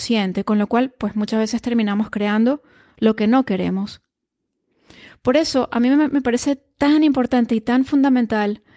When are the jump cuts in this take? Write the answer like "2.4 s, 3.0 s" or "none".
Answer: none